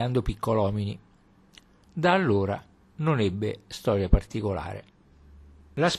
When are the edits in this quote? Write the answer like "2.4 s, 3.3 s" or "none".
1.8 s